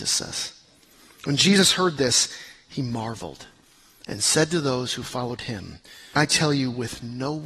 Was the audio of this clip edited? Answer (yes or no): yes